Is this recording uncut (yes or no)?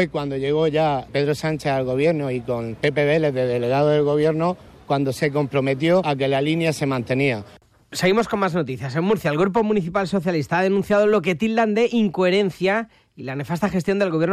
yes